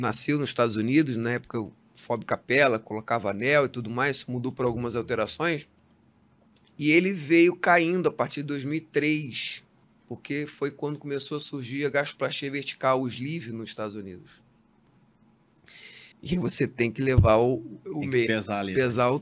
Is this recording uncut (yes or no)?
no